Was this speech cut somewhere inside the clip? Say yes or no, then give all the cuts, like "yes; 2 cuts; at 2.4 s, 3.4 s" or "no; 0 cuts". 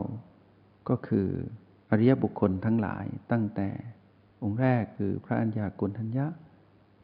no; 0 cuts